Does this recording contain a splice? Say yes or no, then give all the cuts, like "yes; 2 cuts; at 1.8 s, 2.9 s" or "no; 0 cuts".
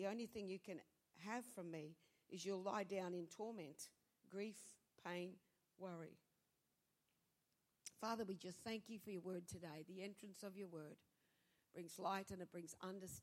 no; 0 cuts